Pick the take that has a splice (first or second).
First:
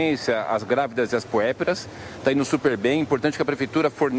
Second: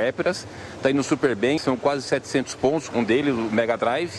second